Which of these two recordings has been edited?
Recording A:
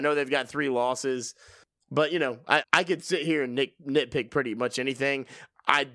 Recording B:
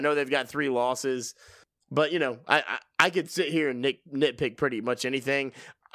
A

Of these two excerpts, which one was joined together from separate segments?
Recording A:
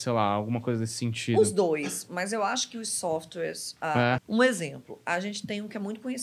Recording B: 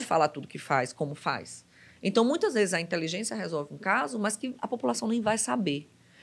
A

